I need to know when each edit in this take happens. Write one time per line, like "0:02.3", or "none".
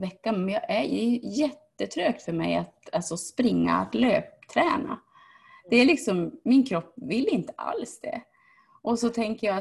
none

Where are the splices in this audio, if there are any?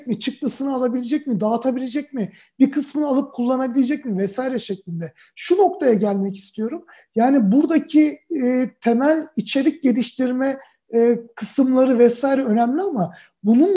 none

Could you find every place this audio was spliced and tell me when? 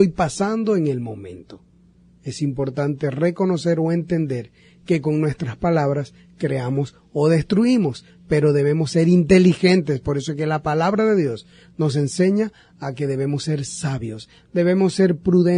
none

